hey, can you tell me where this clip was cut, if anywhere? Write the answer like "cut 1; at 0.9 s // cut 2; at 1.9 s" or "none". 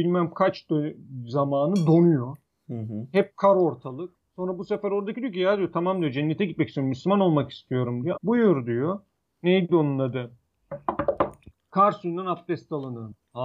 cut 1; at 8.1 s